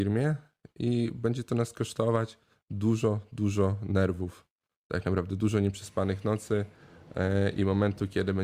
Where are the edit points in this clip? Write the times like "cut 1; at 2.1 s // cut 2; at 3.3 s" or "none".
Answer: none